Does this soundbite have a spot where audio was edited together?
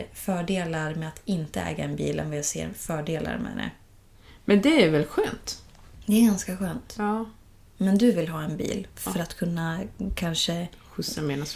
yes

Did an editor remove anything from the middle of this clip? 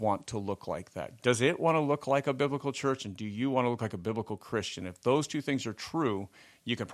yes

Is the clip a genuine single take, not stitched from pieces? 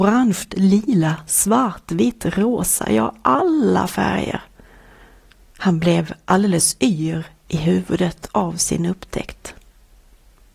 yes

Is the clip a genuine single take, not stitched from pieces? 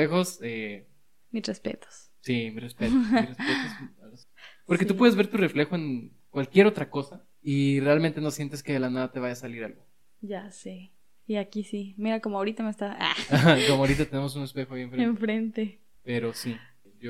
no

